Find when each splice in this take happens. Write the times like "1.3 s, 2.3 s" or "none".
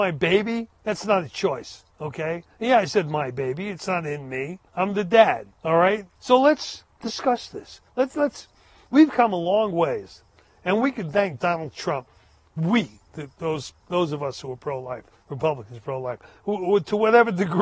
6.1 s, 7.9 s